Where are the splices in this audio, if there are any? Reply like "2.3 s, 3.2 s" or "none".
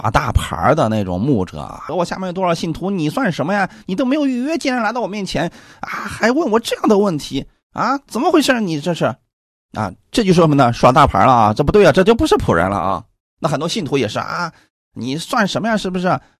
1.9 s